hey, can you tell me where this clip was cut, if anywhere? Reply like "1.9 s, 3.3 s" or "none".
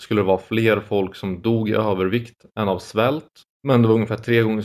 3.5 s